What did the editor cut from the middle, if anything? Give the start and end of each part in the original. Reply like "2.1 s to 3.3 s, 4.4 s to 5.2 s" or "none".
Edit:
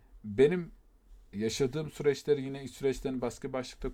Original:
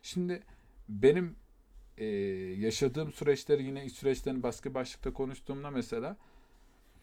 2.0 s to 2.5 s

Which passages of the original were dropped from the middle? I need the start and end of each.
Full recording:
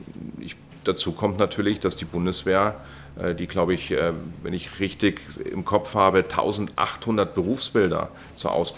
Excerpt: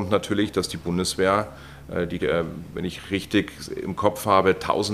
3.5 s to 3.9 s

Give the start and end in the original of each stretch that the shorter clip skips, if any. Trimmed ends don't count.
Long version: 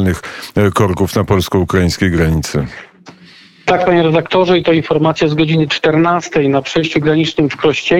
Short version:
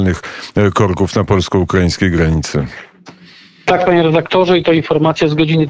none

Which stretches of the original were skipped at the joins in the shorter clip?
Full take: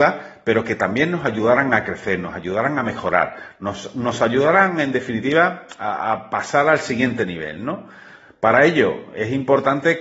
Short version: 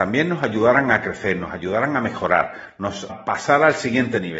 3.9 s to 6.1 s

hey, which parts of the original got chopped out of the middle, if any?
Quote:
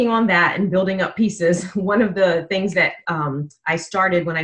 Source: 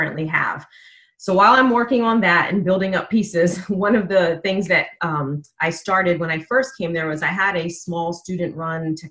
none

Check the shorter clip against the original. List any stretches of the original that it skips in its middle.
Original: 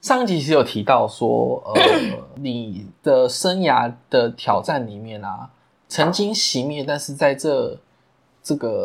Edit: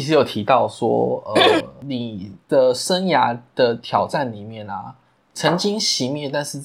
2.0 s to 2.1 s

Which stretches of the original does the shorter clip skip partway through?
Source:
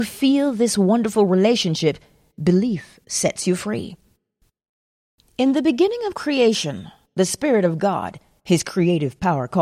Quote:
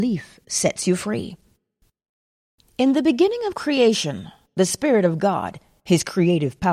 none

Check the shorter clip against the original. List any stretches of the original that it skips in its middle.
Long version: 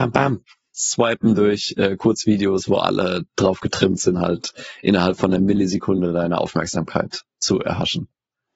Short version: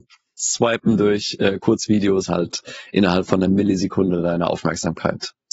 2.7 s to 4.2 s

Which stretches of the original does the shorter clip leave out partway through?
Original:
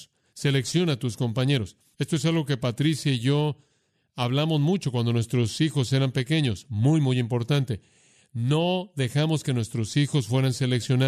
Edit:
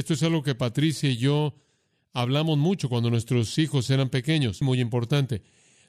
6.6 s to 7.0 s

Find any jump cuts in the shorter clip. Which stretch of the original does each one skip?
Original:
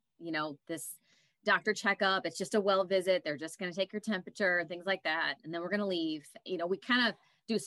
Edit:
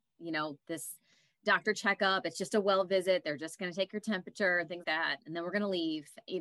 4.8 s to 5.0 s

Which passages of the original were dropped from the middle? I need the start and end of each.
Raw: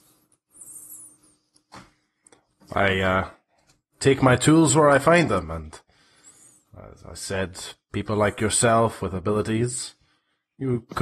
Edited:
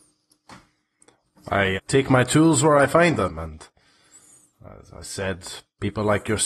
3.0 s to 3.9 s

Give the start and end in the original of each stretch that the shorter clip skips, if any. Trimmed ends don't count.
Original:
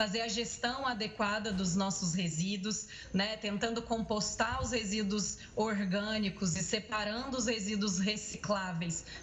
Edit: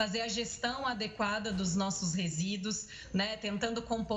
none

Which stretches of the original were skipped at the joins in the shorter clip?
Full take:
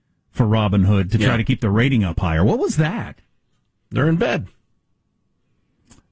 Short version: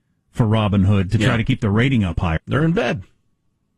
2.4 s to 3.8 s

